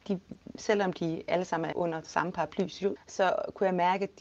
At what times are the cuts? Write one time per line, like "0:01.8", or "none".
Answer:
0:01.7
0:03.0